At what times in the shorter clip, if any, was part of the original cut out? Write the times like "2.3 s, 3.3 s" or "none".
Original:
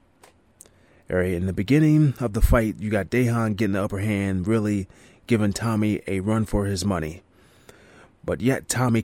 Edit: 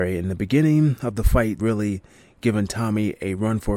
1.6 s